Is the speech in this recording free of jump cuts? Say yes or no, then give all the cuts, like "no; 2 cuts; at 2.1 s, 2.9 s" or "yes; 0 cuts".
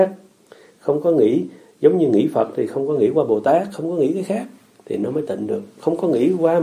yes; 0 cuts